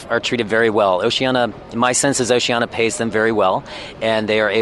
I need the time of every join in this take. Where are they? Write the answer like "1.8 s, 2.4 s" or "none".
none